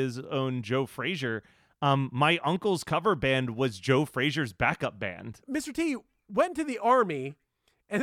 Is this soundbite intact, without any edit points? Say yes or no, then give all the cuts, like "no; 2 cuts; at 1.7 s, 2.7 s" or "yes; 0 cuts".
no; 1 cut; at 5.4 s